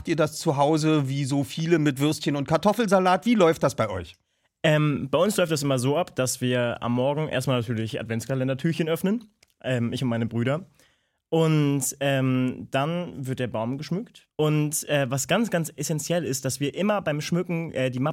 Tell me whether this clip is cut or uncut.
cut